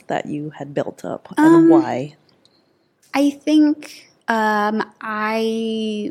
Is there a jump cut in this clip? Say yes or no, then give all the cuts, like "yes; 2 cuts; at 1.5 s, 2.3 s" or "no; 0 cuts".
yes; 1 cut; at 4.2 s